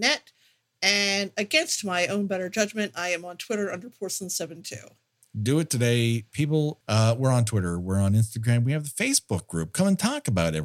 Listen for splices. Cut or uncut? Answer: cut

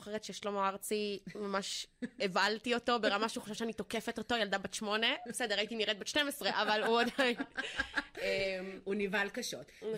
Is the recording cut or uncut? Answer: uncut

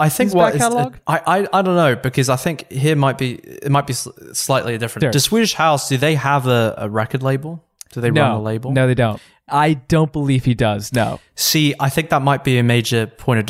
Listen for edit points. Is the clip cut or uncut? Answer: cut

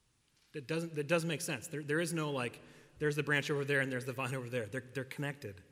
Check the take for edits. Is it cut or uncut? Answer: uncut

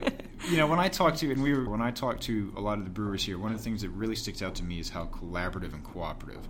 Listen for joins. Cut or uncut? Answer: cut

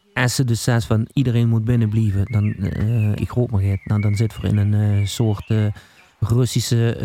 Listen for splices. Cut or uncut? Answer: cut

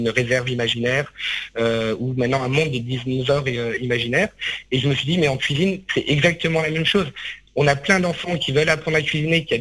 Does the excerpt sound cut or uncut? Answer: uncut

